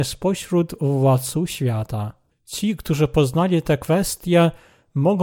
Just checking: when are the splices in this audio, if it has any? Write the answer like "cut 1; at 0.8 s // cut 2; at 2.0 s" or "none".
cut 1; at 2.3 s